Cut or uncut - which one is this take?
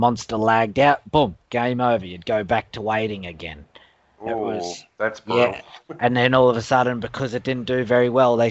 uncut